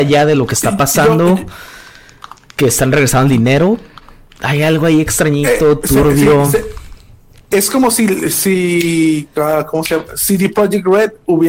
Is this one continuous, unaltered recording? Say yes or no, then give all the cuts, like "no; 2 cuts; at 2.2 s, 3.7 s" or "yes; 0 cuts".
yes; 0 cuts